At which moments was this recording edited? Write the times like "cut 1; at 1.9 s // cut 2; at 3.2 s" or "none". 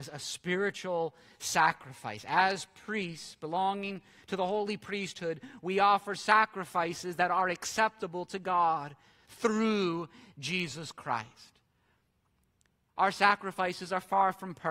none